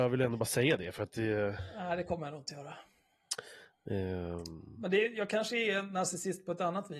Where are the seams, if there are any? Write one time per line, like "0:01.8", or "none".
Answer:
none